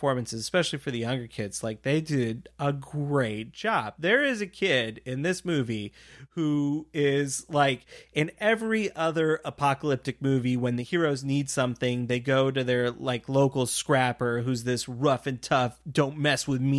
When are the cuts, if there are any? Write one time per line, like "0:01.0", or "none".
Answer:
none